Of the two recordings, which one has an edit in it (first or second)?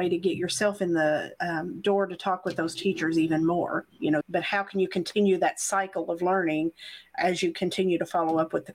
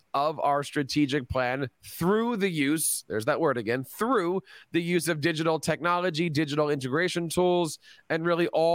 first